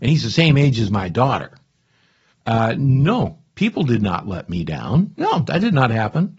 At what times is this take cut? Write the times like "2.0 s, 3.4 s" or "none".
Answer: 2.3 s